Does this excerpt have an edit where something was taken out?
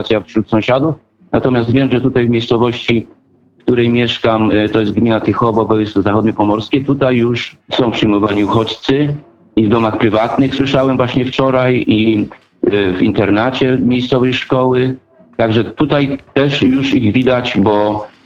yes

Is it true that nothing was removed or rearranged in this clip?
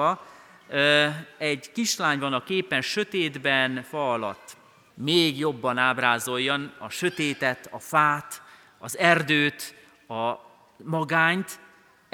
no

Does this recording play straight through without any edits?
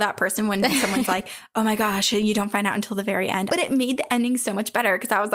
no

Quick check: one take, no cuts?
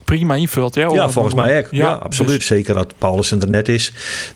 no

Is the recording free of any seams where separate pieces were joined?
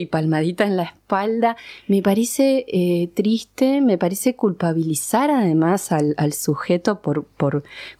yes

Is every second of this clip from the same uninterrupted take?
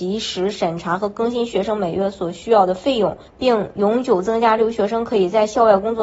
no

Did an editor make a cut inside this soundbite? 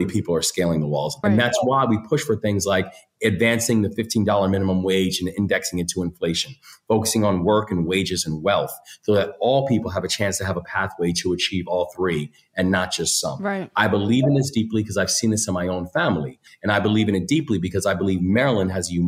yes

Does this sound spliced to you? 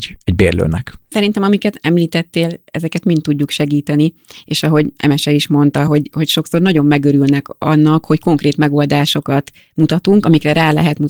no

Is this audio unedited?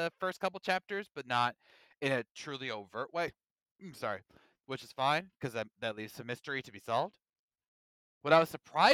yes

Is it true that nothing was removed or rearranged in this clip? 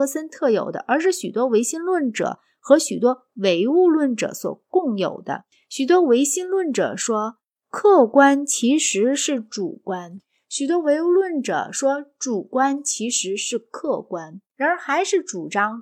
no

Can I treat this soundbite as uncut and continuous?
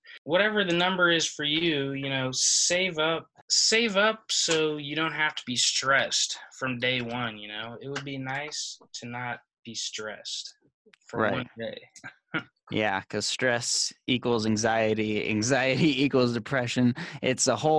yes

